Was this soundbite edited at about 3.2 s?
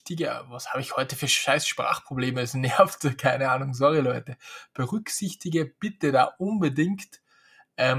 no; 0 cuts

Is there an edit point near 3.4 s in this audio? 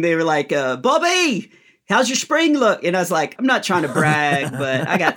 yes; 1 cut; at 3.4 s

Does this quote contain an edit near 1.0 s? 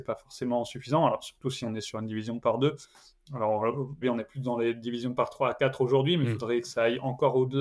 no; 1 cut; at 4.0 s

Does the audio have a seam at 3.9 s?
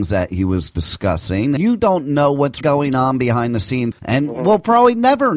yes; 3 cuts; at 1.6 s, 2.6 s, 3.9 s

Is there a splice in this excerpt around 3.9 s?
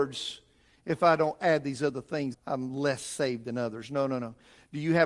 no; 1 cut; at 2.3 s

